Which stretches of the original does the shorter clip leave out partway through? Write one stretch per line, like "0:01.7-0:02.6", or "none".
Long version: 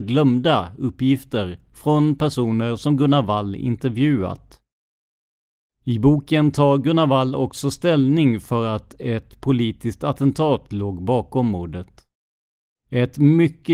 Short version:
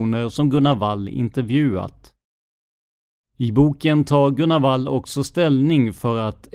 none